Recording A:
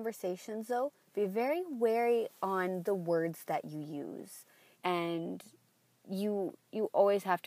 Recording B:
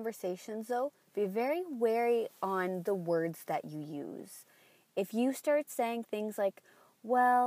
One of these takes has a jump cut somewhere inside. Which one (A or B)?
A